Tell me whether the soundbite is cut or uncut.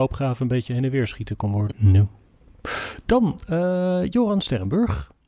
cut